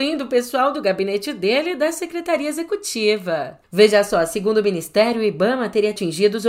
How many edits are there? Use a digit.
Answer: 1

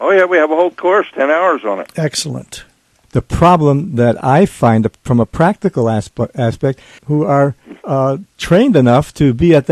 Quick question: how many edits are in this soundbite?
2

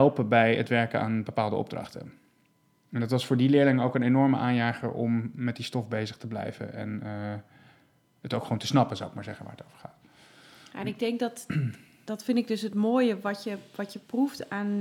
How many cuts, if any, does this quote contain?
0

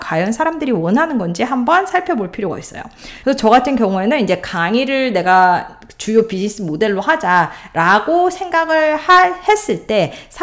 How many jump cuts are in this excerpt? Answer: 1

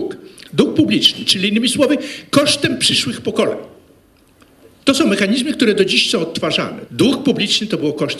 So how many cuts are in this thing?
1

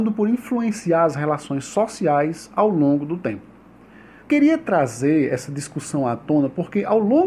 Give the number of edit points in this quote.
1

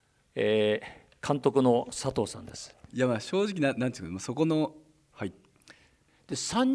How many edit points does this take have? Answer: 2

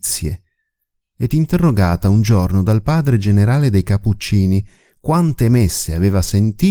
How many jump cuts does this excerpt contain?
1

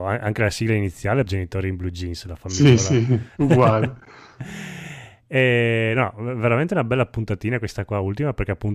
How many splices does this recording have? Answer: 1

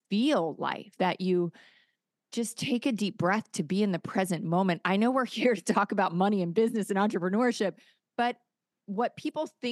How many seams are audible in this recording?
1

